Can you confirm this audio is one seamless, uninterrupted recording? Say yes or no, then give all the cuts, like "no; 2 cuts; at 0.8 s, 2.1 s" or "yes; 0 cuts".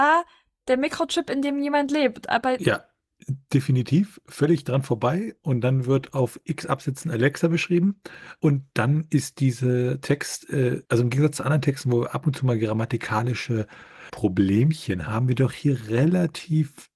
no; 2 cuts; at 10.9 s, 15.1 s